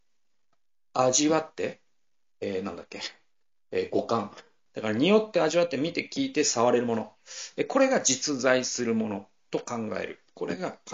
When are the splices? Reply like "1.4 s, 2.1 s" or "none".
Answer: 4.7 s